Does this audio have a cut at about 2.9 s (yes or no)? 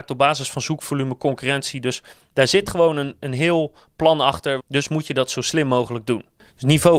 no